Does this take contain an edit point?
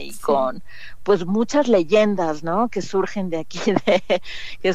no; 0 cuts

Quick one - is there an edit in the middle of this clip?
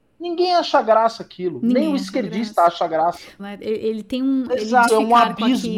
yes; 2 cuts; at 3.4 s, 4.9 s

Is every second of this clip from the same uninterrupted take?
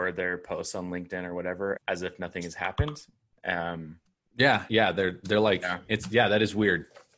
no; 3 cuts; at 1.8 s, 3.4 s, 4.7 s

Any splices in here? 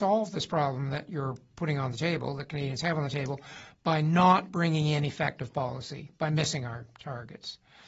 no; 0 cuts

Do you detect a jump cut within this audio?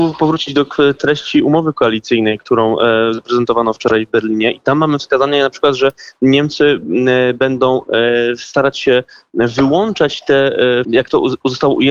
yes; 1 cut; at 10.8 s

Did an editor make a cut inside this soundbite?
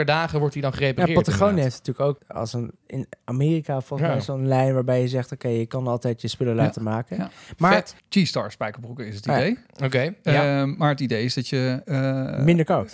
yes; 2 cuts; at 2.2 s, 8.0 s

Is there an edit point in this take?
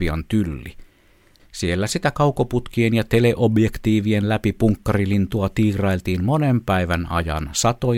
yes; 1 cut; at 1.4 s

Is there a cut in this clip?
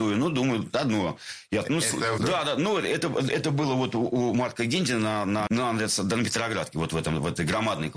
yes; 2 cuts; at 2.2 s, 5.5 s

